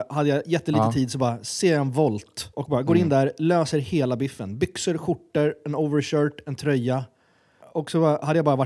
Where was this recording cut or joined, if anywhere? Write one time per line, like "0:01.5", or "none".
0:02.5